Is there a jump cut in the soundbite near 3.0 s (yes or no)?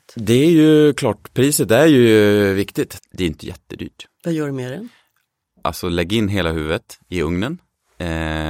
yes